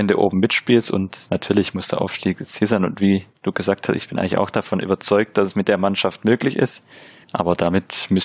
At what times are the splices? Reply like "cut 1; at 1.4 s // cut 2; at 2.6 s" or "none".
cut 1; at 7.2 s